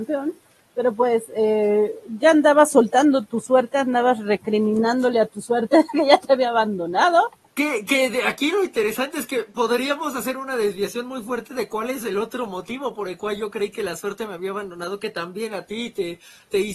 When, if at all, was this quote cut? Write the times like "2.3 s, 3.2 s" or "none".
7.9 s